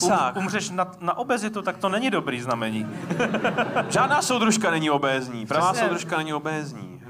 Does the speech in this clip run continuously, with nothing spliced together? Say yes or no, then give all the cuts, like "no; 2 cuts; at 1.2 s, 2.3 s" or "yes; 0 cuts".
yes; 0 cuts